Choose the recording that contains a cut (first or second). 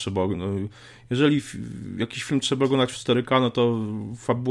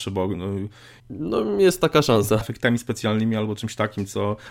second